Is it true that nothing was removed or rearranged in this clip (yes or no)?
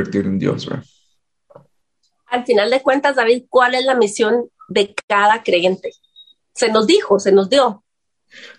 yes